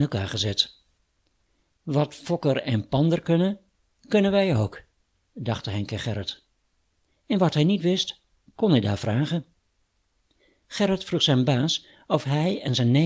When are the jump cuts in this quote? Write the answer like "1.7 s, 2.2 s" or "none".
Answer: 7.1 s

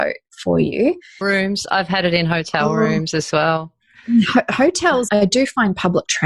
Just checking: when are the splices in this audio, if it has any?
1.2 s, 5.1 s

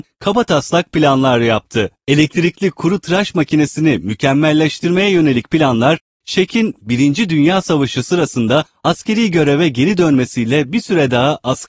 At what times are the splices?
2.0 s

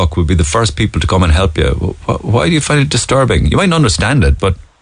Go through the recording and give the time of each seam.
none

